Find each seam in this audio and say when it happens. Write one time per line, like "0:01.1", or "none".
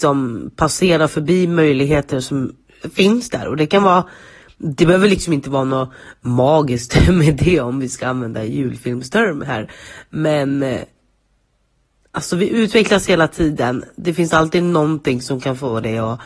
none